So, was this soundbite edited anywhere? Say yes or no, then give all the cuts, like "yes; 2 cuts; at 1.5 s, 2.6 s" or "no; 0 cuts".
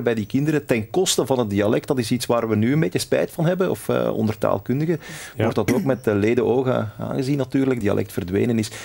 yes; 1 cut; at 7.8 s